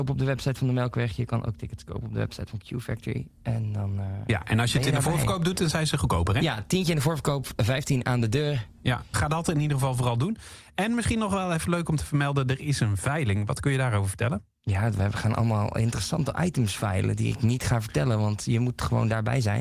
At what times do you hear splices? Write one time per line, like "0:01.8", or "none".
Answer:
0:09.1